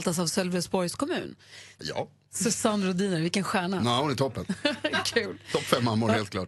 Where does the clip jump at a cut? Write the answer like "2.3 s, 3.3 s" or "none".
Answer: 1.8 s